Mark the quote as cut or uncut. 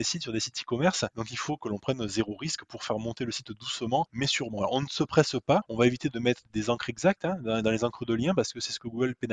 cut